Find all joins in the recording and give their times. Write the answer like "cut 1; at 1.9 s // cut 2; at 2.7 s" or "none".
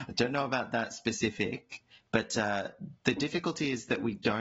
none

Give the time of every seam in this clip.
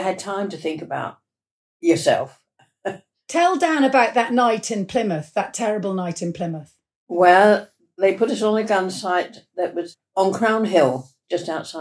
none

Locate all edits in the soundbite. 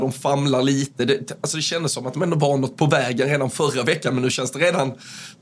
none

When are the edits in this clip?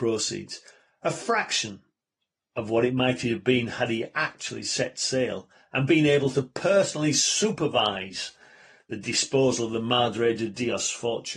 none

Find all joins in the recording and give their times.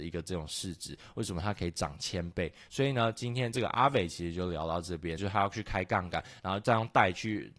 cut 1; at 2.7 s // cut 2; at 5.2 s // cut 3; at 6.4 s

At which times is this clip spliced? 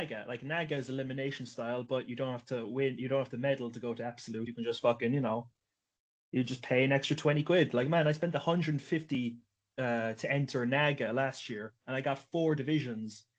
none

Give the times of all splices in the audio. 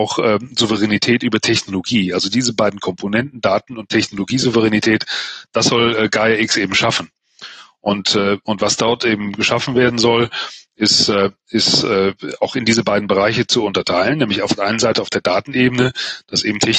none

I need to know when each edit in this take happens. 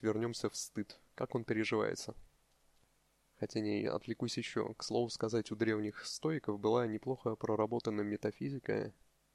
none

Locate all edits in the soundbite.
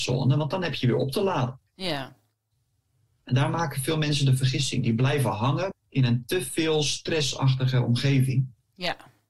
cut 1; at 5.7 s

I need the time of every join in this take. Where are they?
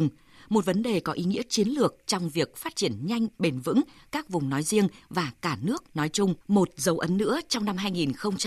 cut 1; at 6.4 s

